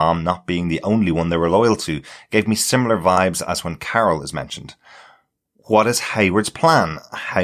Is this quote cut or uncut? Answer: uncut